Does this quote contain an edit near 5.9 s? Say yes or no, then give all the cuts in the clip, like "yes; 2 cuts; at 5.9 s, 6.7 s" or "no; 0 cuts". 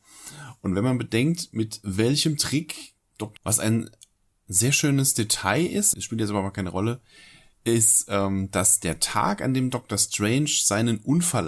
yes; 2 cuts; at 3.4 s, 5.9 s